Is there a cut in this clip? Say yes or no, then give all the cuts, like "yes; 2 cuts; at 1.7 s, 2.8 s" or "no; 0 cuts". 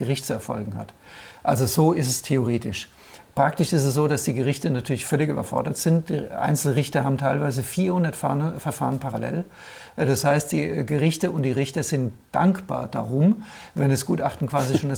no; 0 cuts